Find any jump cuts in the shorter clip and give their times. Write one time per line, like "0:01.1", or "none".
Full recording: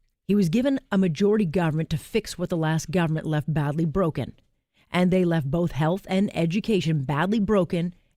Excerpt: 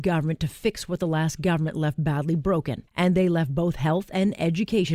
0:02.9